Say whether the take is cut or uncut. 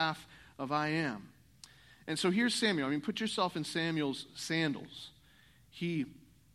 uncut